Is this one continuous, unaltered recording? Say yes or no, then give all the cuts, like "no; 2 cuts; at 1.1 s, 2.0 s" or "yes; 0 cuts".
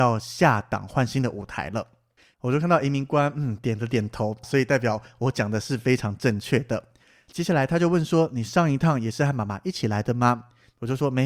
no; 1 cut; at 4.4 s